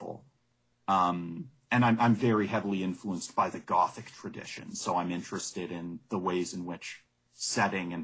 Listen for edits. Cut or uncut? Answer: uncut